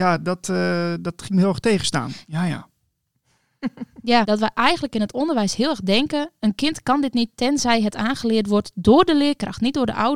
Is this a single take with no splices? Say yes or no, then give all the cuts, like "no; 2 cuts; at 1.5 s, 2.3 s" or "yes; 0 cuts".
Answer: no; 2 cuts; at 2.2 s, 4.2 s